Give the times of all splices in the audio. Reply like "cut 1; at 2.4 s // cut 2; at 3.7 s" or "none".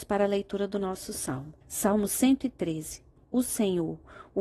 cut 1; at 1.6 s